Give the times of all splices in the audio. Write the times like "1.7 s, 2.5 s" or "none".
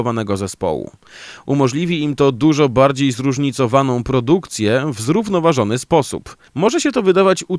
6.5 s